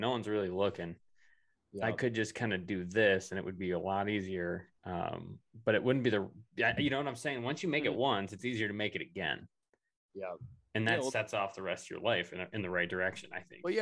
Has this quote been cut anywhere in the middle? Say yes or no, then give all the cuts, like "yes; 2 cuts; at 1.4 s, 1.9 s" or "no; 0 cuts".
no; 0 cuts